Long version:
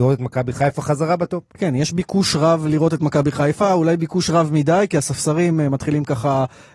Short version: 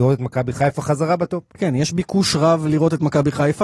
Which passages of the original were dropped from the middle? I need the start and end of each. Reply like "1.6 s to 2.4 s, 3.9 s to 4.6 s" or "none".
none